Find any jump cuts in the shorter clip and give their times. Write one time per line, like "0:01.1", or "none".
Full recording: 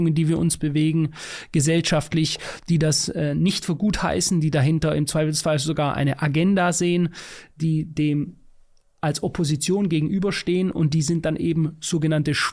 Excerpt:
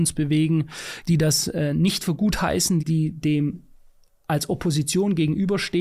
0:01.0
0:02.8